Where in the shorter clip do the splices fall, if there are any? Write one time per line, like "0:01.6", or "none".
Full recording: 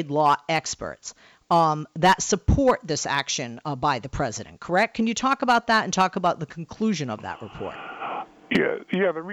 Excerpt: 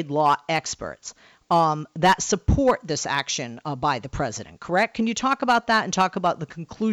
none